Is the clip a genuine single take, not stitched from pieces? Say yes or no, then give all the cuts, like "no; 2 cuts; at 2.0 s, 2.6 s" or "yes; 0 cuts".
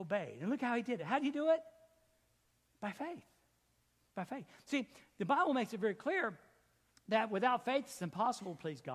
yes; 0 cuts